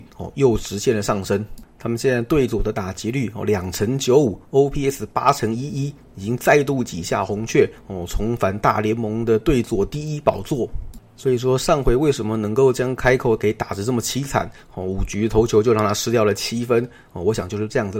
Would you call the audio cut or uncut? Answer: uncut